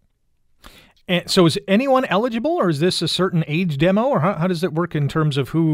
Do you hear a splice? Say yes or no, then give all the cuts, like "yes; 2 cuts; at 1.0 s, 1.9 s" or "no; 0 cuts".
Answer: no; 0 cuts